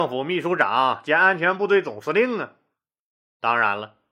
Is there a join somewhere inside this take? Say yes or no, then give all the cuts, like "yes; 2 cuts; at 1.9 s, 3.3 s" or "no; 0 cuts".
no; 0 cuts